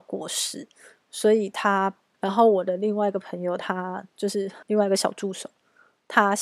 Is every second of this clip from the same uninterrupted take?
no; 2 cuts; at 2.1 s, 4.6 s

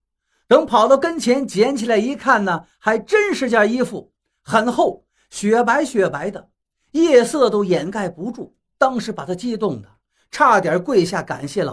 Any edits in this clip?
no; 0 cuts

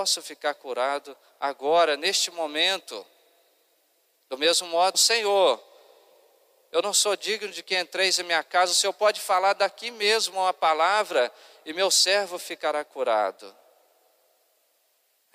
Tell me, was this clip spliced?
yes; 1 cut; at 4.9 s

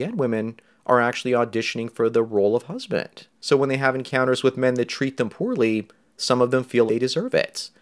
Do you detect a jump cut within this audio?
yes; 2 cuts; at 3.4 s, 6.9 s

